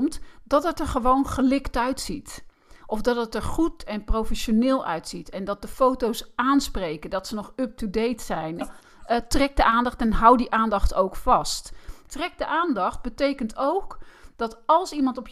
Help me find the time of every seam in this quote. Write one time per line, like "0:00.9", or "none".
0:08.6
0:12.1